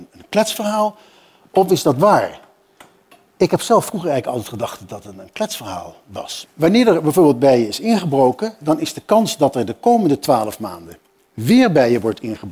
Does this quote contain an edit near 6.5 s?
yes; 1 cut; at 6.5 s

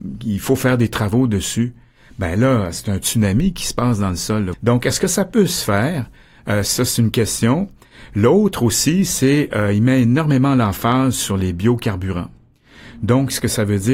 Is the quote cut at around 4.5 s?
yes; 1 cut; at 4.5 s

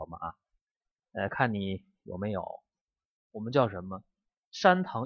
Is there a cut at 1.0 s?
no; 1 cut; at 3.2 s

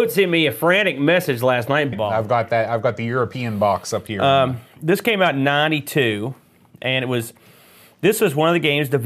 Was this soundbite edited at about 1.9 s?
yes; 1 cut; at 1.9 s

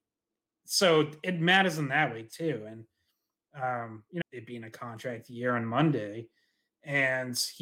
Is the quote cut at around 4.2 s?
yes; 1 cut; at 4.2 s

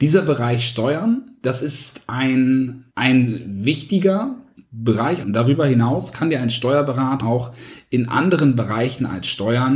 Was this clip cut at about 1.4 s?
no; 3 cuts; at 2.9 s, 5.2 s, 7.2 s

